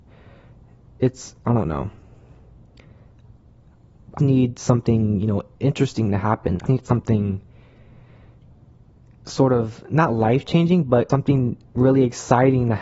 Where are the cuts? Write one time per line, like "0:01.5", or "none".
0:04.2
0:06.7
0:11.1